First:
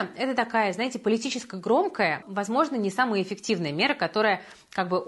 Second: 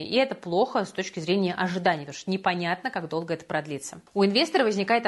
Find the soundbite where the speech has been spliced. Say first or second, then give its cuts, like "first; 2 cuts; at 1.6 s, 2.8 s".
first; 1 cut; at 2.2 s